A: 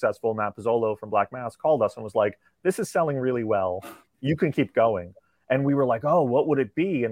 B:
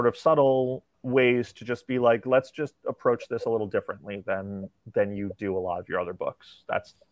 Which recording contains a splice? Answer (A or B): B